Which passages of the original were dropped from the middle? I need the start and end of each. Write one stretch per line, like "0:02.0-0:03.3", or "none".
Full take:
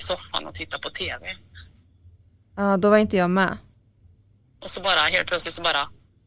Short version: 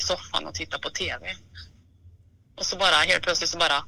0:02.5-0:04.5